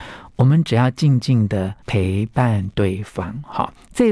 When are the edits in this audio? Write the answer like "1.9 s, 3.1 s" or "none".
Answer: 1.8 s